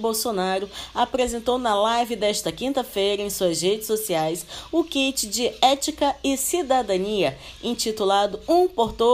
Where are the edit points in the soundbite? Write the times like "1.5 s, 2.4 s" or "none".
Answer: none